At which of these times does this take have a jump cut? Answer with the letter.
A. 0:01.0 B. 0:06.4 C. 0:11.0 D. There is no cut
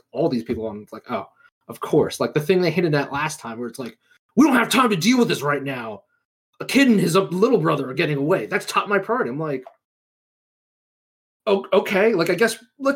D